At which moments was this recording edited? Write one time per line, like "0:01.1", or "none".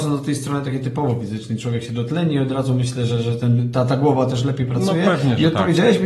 none